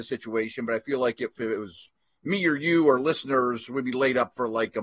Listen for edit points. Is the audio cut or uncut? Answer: uncut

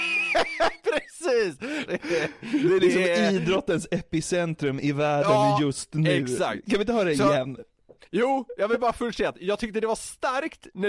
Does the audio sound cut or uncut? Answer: cut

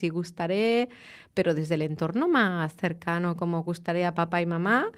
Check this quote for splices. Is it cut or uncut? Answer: uncut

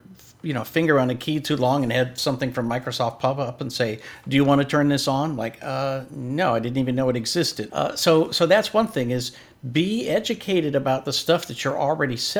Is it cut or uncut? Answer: cut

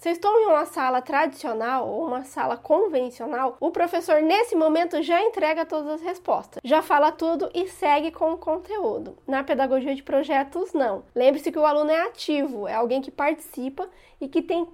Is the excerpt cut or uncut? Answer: uncut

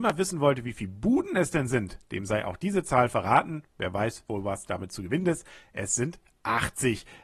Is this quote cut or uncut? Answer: cut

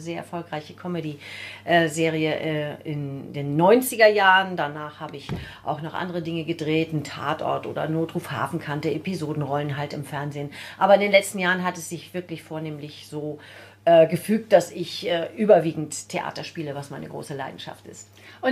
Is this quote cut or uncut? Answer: uncut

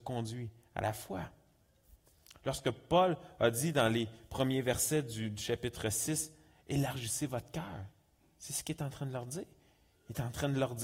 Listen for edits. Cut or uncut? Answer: uncut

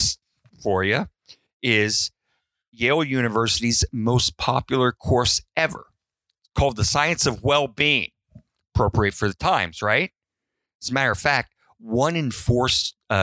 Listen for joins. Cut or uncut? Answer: uncut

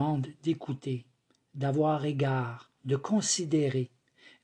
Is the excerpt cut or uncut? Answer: uncut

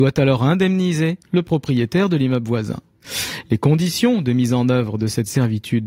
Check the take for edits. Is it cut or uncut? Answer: cut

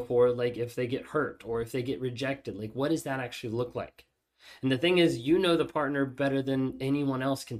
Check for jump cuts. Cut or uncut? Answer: uncut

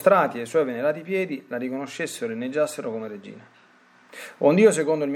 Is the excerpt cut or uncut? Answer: uncut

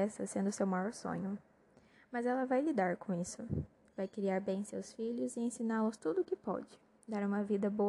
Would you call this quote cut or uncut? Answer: uncut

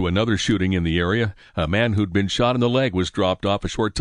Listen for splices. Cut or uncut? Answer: uncut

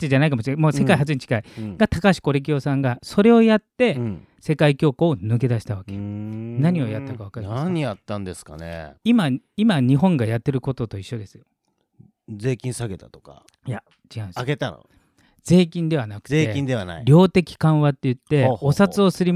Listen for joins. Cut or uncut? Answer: uncut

